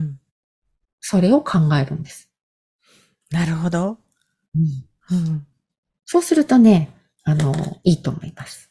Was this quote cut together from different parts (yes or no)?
no